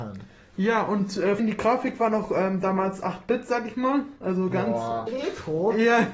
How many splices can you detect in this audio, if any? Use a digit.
2